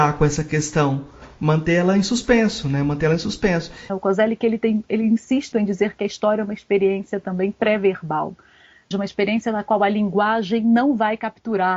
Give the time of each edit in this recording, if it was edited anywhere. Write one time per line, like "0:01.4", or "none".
0:03.9
0:05.5
0:08.9